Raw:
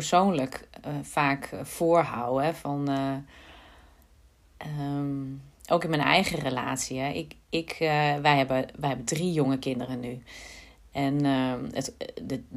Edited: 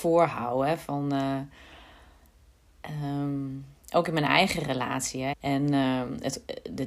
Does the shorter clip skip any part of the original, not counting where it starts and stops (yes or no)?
yes